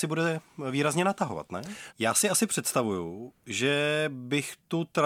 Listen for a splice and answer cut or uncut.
cut